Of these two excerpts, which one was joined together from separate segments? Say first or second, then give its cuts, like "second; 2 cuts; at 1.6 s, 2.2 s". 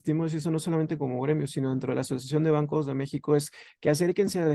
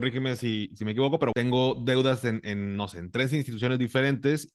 second; 1 cut; at 1.3 s